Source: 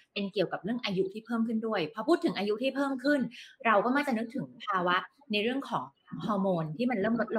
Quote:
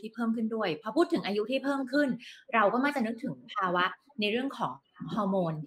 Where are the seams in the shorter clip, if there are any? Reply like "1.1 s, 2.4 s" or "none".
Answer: none

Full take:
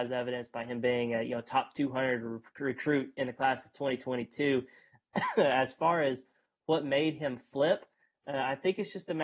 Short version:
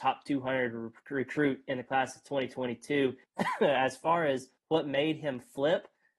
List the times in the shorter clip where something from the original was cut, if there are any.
3.2 s, 4.6 s

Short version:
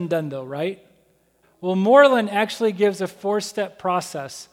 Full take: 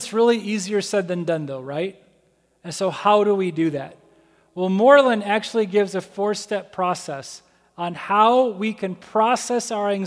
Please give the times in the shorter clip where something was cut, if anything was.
1.4 s

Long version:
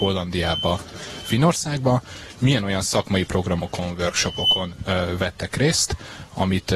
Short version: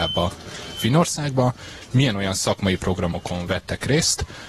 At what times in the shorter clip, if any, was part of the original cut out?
3.5 s

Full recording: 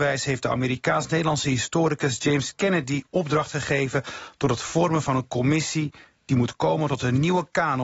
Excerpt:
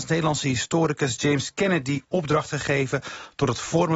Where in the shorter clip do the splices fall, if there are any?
none

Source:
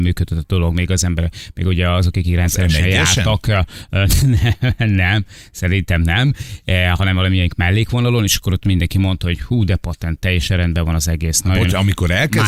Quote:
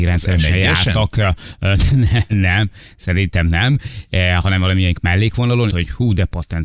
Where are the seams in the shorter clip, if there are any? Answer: 2.3 s, 5.7 s

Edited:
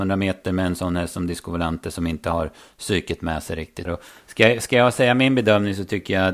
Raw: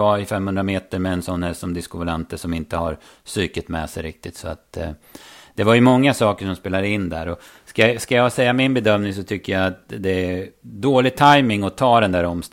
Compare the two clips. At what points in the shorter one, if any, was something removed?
3.9 s

